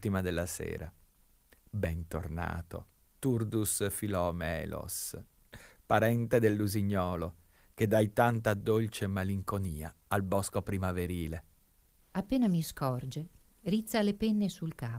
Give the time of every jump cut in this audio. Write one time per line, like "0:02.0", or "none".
0:12.0